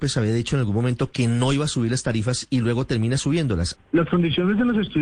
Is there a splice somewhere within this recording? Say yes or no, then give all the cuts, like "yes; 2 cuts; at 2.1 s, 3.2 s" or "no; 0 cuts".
yes; 1 cut; at 3.8 s